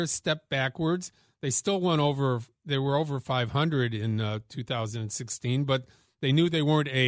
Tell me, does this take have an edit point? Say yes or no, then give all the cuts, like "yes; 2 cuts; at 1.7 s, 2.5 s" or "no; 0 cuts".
no; 0 cuts